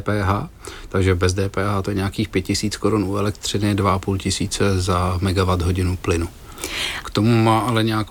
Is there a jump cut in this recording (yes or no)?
yes